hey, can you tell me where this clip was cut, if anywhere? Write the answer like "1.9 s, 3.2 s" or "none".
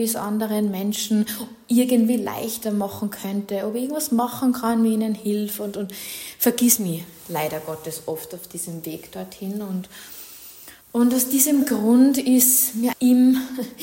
10.8 s, 12.9 s

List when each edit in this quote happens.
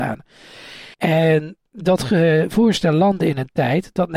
0.9 s

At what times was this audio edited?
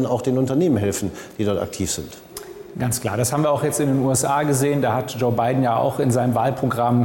none

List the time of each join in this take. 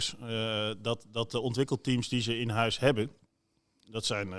none

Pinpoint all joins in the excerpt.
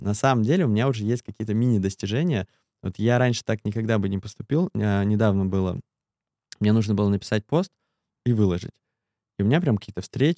none

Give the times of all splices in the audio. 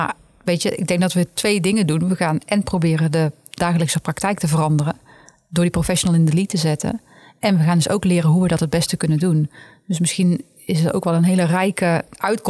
none

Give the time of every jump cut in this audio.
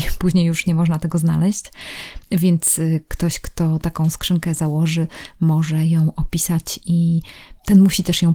none

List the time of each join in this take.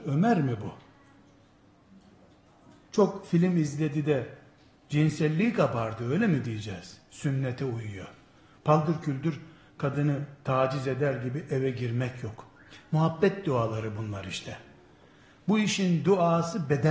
none

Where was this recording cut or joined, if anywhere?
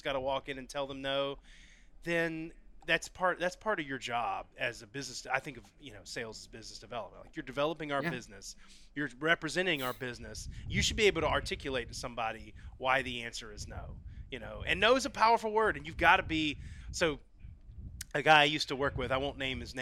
2.8 s

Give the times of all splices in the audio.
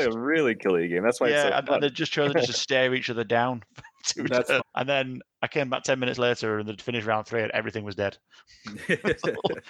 4.6 s

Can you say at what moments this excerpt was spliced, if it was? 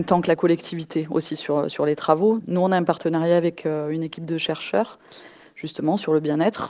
2.4 s

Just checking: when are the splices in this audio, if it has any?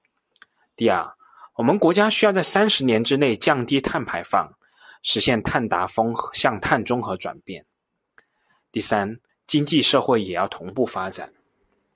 9.3 s

